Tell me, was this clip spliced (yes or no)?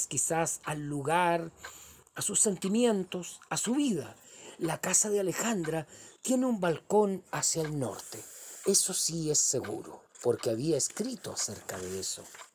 yes